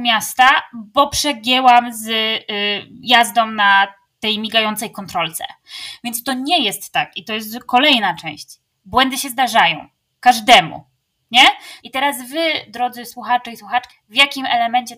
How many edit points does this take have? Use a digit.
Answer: 2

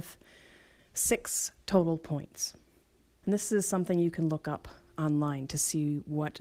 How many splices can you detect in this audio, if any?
1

